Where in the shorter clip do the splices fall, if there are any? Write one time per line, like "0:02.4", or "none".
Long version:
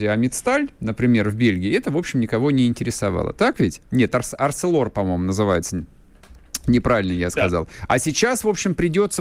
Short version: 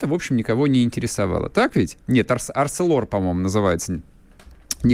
none